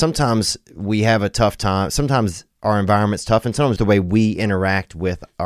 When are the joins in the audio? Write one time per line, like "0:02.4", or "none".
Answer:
0:03.8